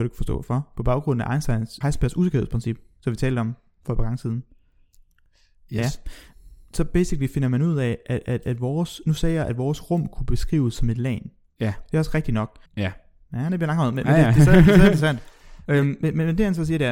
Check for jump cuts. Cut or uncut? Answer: cut